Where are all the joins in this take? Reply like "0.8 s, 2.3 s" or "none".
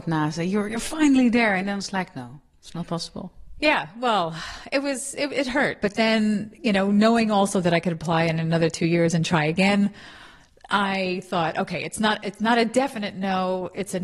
5.8 s